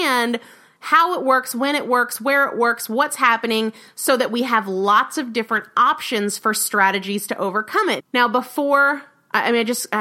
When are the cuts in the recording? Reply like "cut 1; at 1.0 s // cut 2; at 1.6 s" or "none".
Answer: cut 1; at 8.0 s